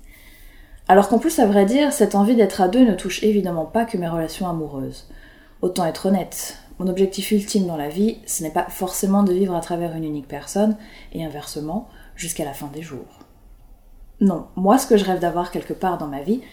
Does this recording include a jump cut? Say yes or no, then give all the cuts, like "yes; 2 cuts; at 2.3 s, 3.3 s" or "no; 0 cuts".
no; 0 cuts